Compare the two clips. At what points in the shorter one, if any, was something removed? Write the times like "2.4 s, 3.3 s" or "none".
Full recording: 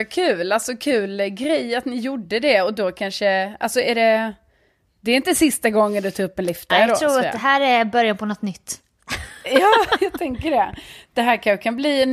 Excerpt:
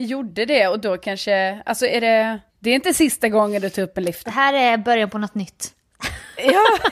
2.5 s, 4.3 s